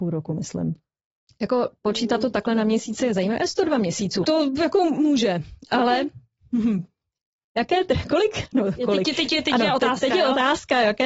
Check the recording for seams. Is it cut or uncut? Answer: cut